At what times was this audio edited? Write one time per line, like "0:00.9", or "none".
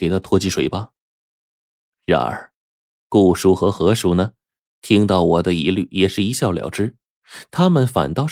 none